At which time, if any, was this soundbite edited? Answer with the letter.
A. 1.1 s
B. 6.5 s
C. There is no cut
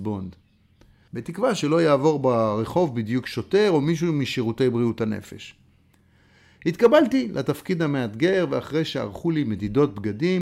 A